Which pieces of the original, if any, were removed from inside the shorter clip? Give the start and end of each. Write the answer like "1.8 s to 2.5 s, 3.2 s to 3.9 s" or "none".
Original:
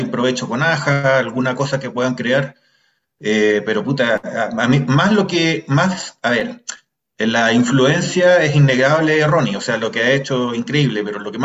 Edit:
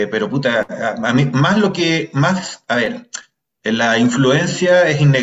none